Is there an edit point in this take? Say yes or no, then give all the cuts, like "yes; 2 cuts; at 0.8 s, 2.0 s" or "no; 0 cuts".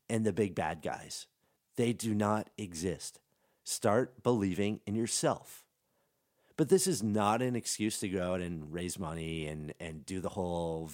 no; 0 cuts